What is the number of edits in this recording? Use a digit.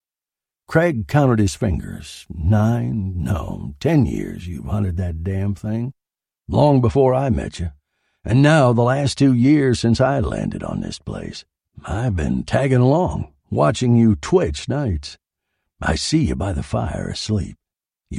0